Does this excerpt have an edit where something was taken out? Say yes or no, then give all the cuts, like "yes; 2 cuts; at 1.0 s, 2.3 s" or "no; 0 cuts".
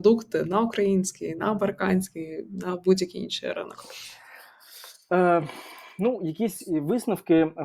no; 0 cuts